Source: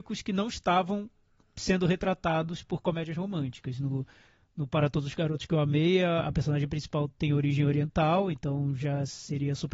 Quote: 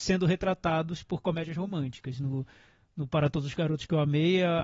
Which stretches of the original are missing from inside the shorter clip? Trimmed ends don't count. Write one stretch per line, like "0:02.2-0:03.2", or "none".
none